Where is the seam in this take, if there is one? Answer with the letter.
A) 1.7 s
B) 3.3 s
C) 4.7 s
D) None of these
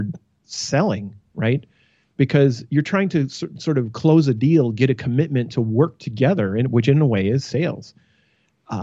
D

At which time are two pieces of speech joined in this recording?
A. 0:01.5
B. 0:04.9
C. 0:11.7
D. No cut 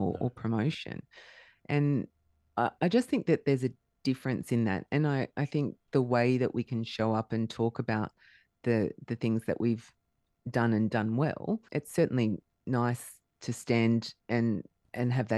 C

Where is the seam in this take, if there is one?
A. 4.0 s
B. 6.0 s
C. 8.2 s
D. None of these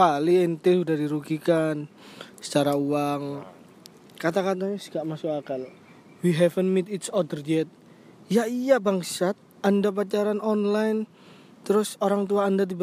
A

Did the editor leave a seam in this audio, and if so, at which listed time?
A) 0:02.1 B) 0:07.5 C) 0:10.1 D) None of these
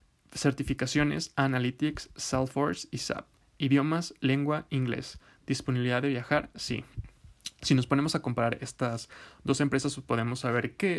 D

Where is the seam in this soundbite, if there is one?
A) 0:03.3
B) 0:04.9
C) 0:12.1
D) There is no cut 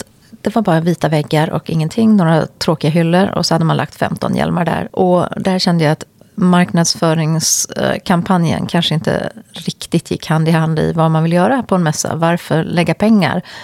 B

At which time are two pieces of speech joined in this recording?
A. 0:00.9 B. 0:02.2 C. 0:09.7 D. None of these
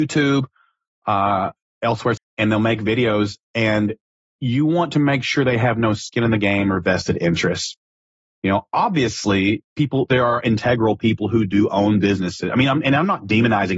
B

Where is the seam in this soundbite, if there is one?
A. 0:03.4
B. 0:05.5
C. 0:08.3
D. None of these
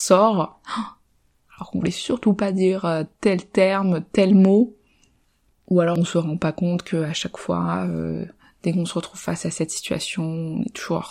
B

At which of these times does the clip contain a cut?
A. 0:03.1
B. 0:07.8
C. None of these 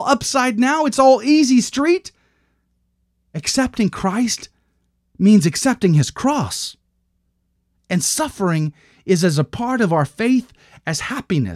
C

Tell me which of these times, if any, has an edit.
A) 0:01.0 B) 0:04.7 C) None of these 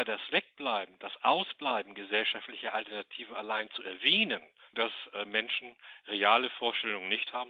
B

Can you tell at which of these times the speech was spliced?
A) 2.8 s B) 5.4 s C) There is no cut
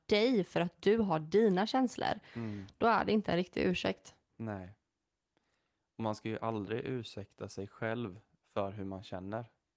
C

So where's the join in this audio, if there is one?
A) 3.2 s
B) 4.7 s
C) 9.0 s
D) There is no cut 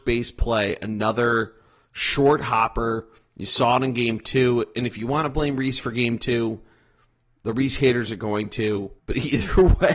C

